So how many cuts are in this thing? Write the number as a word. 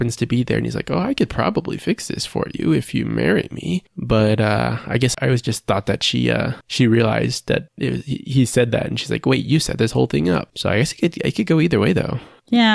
zero